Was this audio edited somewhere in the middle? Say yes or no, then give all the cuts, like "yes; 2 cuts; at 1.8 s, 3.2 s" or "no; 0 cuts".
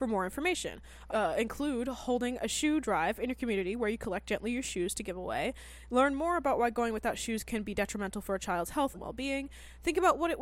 yes; 2 cuts; at 1.1 s, 8.9 s